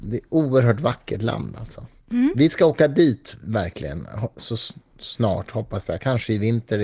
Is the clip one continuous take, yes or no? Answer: yes